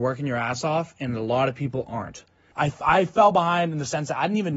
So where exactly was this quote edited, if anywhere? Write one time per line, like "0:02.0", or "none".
0:02.5